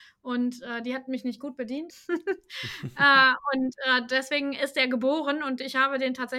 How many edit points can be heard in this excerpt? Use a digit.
1